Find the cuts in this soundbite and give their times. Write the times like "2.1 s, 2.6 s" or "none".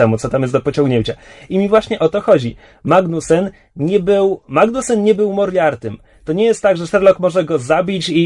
none